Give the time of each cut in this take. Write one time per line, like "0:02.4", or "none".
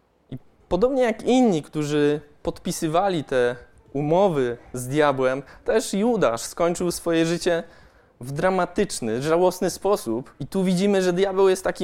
0:10.4